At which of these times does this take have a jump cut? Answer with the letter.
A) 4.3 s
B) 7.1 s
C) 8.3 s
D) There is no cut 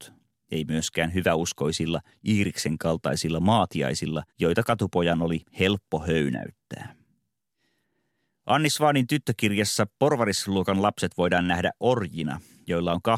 A